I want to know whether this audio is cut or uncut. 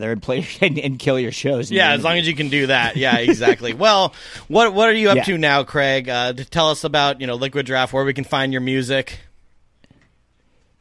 uncut